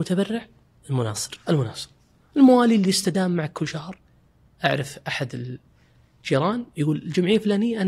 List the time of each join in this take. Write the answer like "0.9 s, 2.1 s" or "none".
none